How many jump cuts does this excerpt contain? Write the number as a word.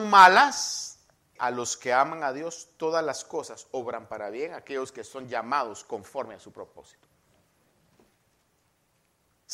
one